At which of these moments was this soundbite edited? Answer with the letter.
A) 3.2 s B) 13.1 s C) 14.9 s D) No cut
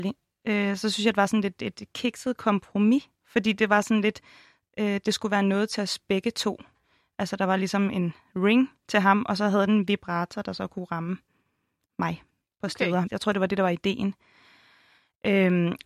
B